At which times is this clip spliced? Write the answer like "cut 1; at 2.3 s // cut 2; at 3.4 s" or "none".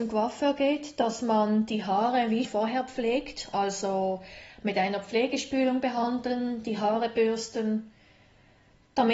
cut 1; at 2.4 s